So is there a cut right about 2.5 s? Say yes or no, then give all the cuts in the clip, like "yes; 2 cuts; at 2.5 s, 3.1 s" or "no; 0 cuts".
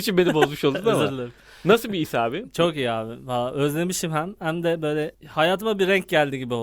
no; 0 cuts